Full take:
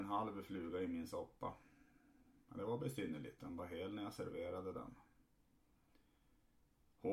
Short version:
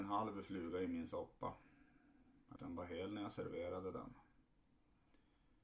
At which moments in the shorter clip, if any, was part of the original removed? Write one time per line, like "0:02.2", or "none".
0:02.6